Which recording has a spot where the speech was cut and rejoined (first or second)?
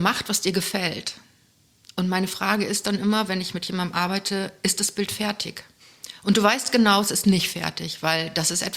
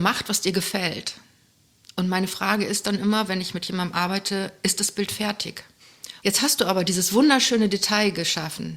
second